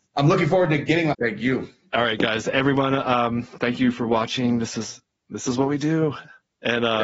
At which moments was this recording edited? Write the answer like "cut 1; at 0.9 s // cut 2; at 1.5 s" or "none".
cut 1; at 1.1 s